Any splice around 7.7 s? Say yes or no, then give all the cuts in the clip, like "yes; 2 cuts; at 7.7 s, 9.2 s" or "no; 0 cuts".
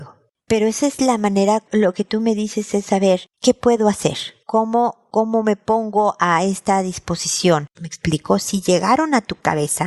yes; 1 cut; at 7.7 s